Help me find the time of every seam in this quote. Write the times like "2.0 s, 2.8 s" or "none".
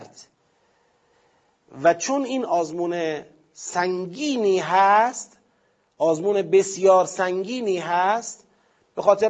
2.5 s